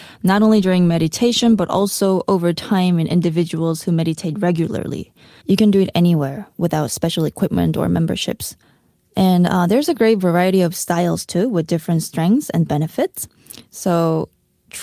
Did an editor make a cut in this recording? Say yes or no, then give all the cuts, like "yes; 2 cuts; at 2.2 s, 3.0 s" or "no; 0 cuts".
yes; 1 cut; at 5.4 s